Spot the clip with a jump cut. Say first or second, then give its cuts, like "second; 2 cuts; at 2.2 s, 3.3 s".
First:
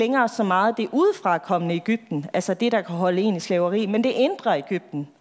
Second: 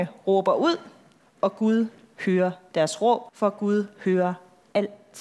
second; 2 cuts; at 1.2 s, 3.3 s